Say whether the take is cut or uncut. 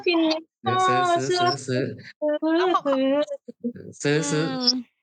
uncut